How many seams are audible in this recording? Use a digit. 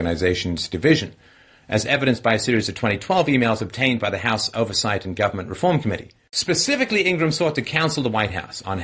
1